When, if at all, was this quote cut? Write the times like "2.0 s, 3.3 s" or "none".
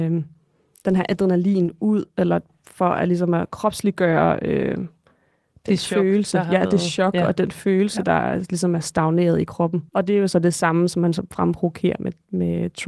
9.9 s